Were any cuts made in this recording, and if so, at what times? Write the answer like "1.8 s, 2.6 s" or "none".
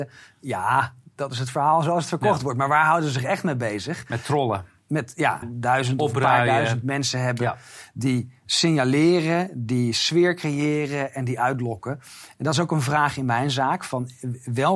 5.4 s